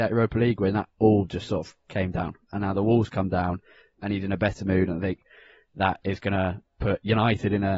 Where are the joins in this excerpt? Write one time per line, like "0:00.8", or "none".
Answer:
none